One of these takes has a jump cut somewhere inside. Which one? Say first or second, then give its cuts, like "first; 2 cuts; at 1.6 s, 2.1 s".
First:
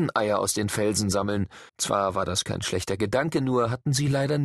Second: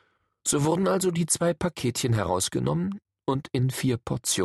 first; 1 cut; at 1.7 s